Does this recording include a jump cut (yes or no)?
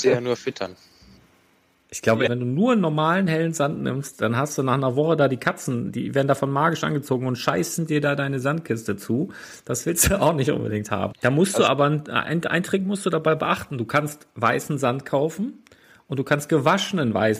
yes